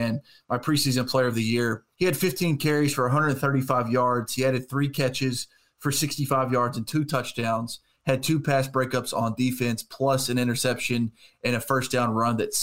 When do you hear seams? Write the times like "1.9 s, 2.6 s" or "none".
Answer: 1.9 s